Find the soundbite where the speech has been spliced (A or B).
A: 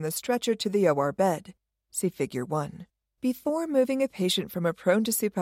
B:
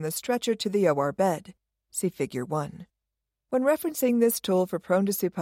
A